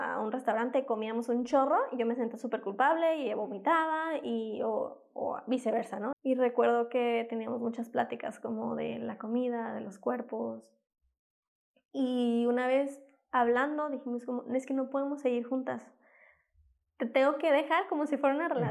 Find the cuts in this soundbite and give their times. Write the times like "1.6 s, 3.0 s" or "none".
6.1 s